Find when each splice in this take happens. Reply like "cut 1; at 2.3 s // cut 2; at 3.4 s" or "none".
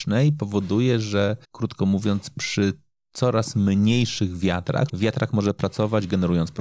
cut 1; at 1.4 s // cut 2; at 4.9 s